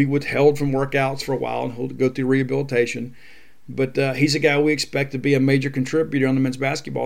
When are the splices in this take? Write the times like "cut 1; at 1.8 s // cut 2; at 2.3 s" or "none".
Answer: none